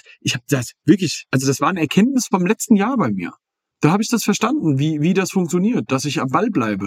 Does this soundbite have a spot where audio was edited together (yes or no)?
yes